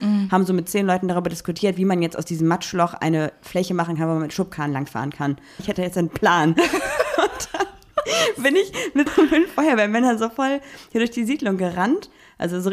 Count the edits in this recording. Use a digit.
2